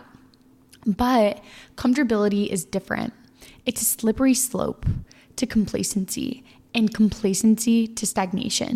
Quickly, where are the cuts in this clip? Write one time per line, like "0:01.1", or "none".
none